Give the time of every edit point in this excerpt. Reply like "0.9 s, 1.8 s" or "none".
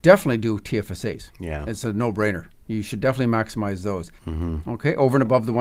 4.2 s